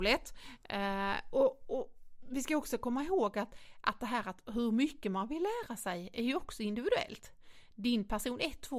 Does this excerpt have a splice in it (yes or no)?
no